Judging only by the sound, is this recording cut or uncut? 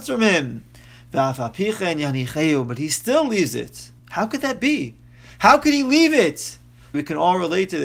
cut